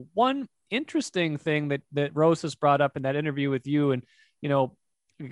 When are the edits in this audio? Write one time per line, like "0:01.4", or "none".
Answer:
none